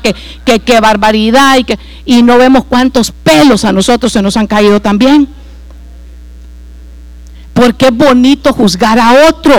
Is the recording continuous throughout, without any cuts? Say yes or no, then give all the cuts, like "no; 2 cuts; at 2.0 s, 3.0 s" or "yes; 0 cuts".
yes; 0 cuts